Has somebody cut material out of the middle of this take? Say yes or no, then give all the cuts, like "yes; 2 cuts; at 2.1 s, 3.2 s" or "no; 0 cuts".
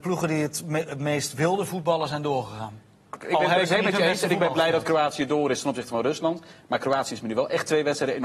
yes; 1 cut; at 3.1 s